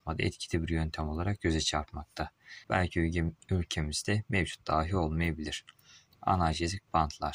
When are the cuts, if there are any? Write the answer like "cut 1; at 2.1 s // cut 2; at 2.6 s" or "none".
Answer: cut 1; at 2.6 s